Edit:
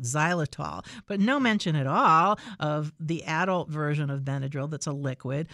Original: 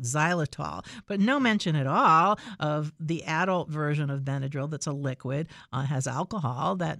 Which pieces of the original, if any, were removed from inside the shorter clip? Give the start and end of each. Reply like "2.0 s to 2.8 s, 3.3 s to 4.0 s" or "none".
none

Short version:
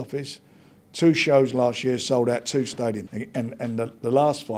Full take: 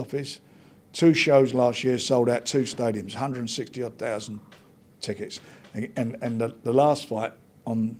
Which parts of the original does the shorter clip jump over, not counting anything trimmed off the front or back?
3.1 s to 5.7 s

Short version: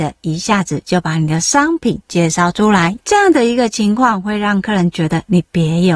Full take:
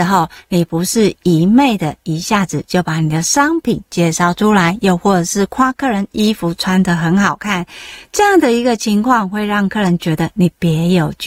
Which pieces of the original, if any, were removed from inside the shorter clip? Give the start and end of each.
4.8 s to 8.1 s

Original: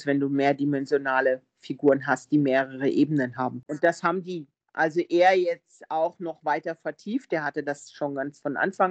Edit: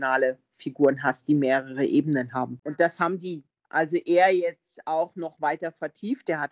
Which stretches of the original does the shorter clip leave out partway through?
none

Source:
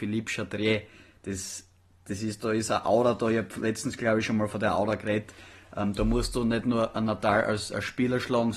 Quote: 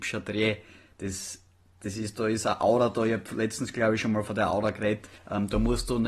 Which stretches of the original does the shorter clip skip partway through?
5.4 s to 5.6 s

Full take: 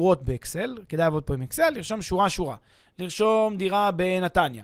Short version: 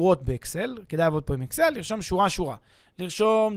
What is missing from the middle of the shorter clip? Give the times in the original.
none

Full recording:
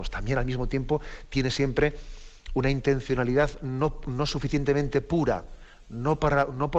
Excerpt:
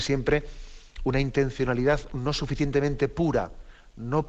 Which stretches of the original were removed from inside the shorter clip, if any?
3.6 s to 4.0 s

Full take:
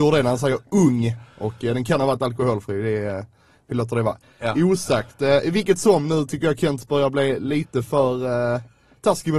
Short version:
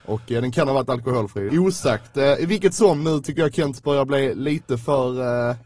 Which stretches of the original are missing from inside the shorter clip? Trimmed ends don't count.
2.8 s to 4.5 s

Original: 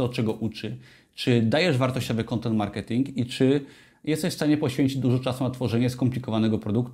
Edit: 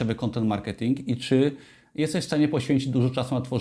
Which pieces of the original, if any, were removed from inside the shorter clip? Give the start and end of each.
none

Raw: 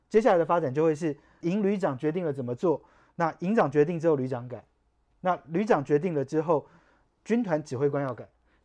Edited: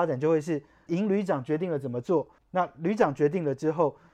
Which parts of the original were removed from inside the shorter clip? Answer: 2.9 s to 5.1 s

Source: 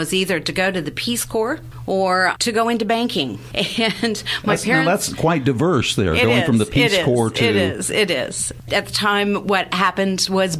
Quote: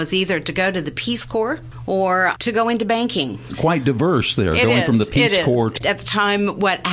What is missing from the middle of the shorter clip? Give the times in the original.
3.5 s to 5.1 s, 7.4 s to 8.6 s

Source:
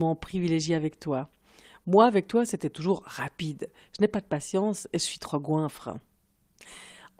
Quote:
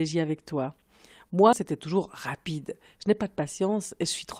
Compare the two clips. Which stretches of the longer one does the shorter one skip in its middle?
2.1 s to 2.5 s

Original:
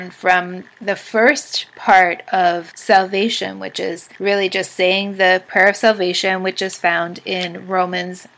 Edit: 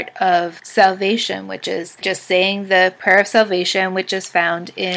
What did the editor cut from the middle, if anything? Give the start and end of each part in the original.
4.1 s to 4.5 s

